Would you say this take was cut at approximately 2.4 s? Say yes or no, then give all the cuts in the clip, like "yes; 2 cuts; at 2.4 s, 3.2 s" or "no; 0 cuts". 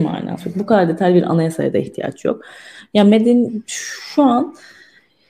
no; 0 cuts